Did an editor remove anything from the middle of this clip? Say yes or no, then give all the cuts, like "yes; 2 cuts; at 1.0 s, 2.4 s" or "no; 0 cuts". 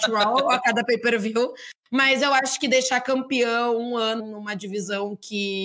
yes; 1 cut; at 4.2 s